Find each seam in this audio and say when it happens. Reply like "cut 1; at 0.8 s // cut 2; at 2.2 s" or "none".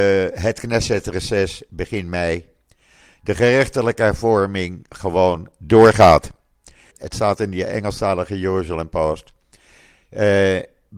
cut 1; at 6.9 s